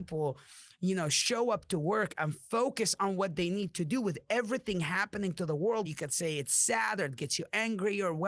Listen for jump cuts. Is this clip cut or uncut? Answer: cut